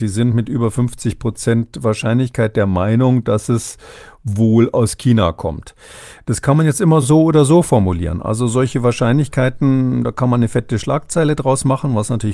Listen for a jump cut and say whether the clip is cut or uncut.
uncut